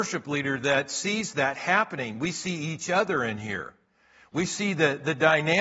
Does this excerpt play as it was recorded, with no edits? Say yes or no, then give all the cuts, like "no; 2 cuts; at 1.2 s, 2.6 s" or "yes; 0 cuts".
yes; 0 cuts